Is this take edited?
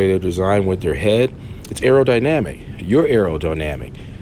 no; 0 cuts

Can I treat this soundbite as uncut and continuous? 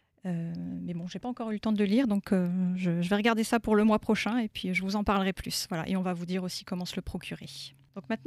yes; 0 cuts

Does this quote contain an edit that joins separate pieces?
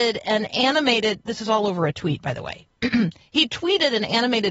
no; 0 cuts

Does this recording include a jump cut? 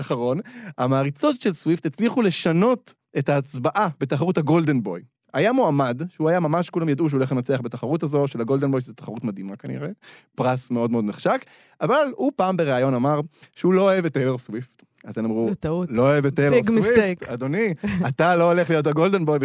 no; 0 cuts

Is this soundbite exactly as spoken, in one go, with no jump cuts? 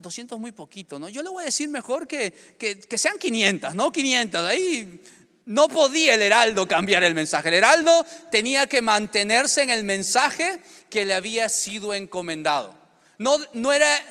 yes; 0 cuts

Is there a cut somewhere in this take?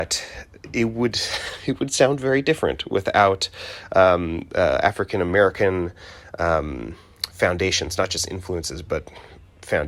no; 0 cuts

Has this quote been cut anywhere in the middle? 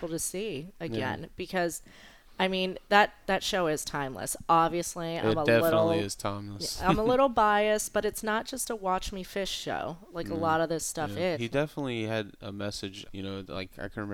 yes; 2 cuts; at 11.3 s, 13.1 s

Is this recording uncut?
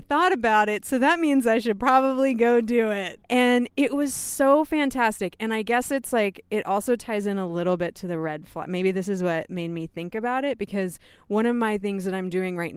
no; 1 cut; at 3.2 s

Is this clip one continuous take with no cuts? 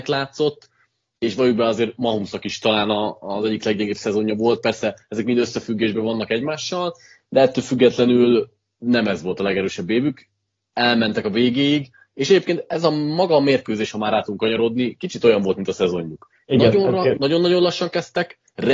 no; 1 cut; at 17.2 s

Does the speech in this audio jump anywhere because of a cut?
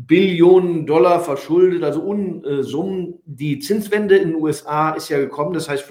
no; 0 cuts

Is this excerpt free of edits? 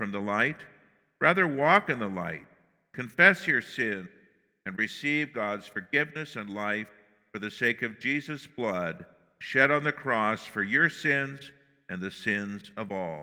yes; 0 cuts

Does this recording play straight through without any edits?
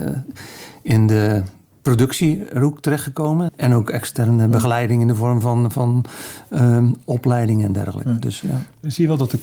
no; 1 cut; at 3.5 s

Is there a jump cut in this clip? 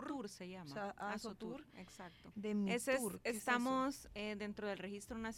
yes; 1 cut; at 2.3 s

